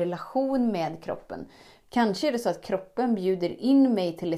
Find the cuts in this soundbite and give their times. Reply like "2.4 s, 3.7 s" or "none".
1.8 s